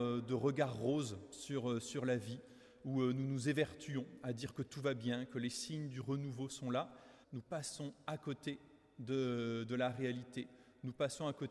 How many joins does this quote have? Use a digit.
1